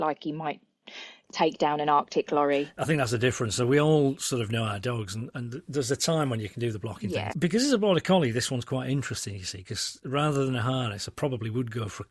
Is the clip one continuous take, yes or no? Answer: no